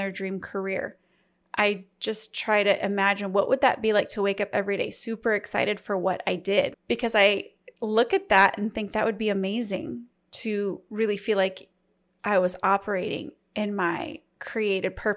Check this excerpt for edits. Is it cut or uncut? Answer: cut